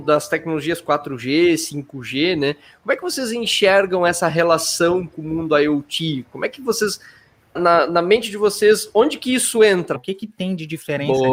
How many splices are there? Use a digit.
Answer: 2